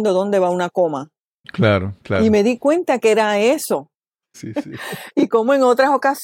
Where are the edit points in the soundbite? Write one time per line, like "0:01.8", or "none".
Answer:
0:01.4
0:04.3

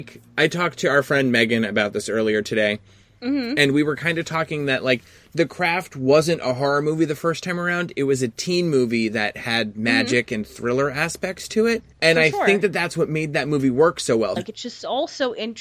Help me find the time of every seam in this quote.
0:11.9
0:14.4

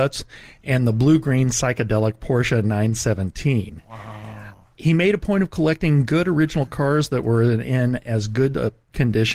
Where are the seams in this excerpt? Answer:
none

